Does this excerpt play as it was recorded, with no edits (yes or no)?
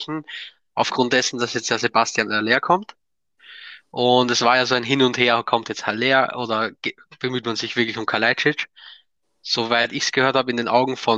yes